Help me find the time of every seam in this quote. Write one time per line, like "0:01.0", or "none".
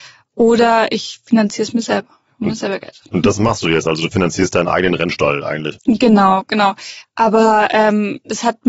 0:05.7
0:07.0